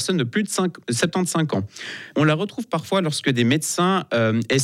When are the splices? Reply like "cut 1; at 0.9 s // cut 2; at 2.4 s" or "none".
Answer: cut 1; at 2.1 s